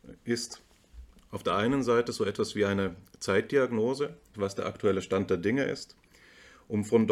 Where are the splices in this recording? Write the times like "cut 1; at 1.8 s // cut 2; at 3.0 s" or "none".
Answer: cut 1; at 4.3 s

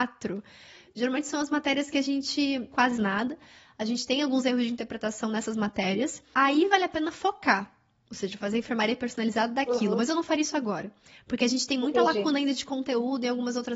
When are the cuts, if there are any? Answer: cut 1; at 2.7 s // cut 2; at 6.3 s

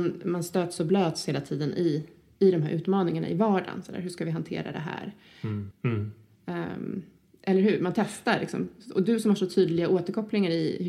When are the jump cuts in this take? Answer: cut 1; at 5.7 s

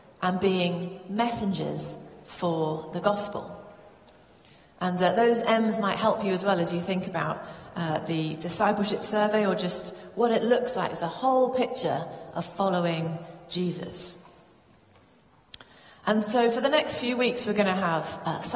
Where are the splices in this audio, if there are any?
none

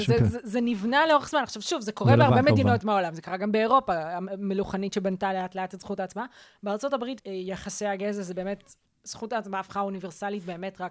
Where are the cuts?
cut 1; at 7.2 s

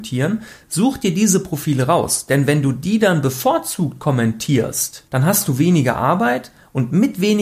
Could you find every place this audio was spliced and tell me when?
cut 1; at 5.1 s

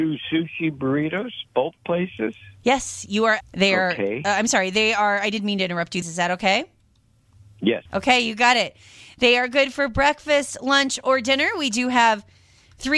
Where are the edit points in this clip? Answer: cut 1; at 3.4 s // cut 2; at 6.0 s // cut 3; at 7.9 s

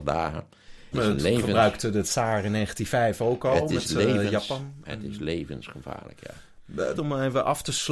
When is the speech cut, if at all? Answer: cut 1; at 0.9 s // cut 2; at 7.0 s

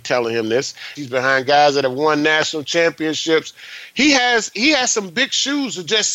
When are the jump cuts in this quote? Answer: cut 1; at 1.0 s // cut 2; at 4.5 s

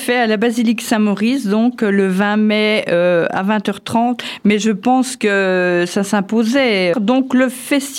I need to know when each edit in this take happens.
cut 1; at 6.9 s

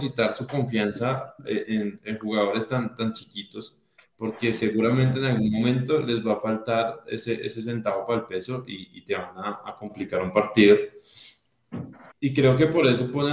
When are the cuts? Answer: cut 1; at 12.1 s

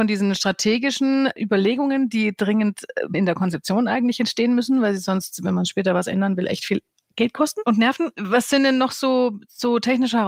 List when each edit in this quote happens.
cut 1; at 3.1 s

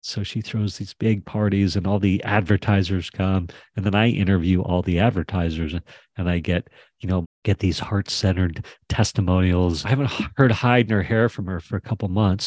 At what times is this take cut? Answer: cut 1; at 7.2 s // cut 2; at 9.8 s

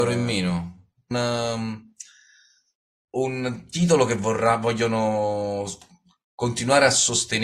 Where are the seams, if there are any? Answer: cut 1; at 1.1 s

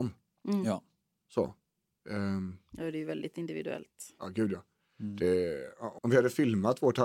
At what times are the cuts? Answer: cut 1; at 6.0 s

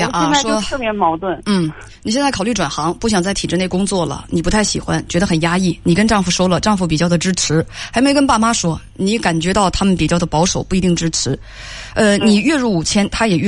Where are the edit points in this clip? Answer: none

